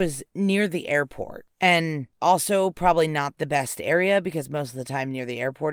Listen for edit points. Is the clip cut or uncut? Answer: uncut